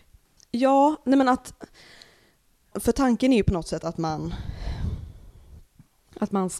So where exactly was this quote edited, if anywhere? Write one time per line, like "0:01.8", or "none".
0:02.7